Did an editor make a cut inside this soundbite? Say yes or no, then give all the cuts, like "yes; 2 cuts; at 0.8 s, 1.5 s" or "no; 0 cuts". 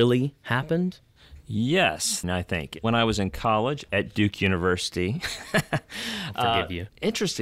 yes; 1 cut; at 2.2 s